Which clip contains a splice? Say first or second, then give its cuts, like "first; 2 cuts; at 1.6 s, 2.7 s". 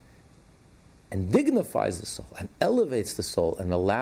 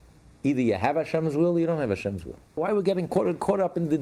second; 1 cut; at 2.6 s